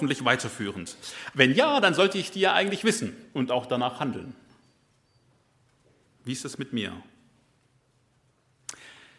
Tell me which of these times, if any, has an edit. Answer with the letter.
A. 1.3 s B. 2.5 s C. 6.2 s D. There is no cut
A